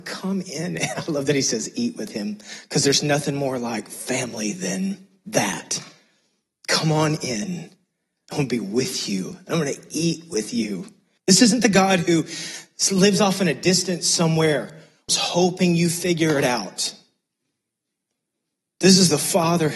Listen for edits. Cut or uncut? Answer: cut